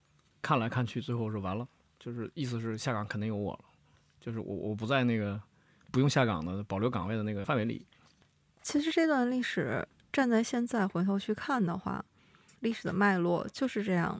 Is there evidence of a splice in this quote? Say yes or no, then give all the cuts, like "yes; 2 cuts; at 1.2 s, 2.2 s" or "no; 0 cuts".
no; 0 cuts